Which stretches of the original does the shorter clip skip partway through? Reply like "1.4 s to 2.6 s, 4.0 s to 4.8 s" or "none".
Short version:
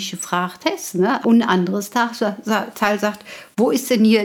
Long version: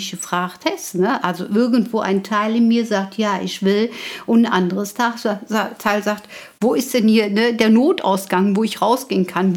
1.2 s to 4.2 s